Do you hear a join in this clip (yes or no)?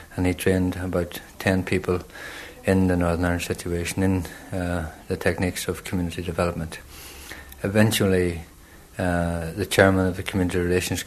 no